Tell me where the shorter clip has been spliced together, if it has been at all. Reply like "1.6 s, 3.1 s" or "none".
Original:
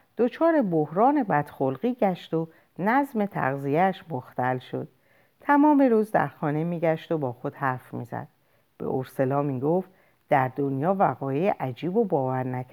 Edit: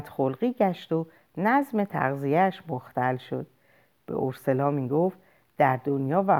3.9 s